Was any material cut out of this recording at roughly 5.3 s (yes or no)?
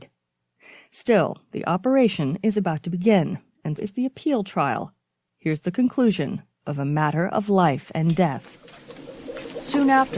no